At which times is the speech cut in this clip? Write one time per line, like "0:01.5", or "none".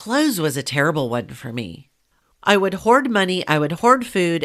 0:02.3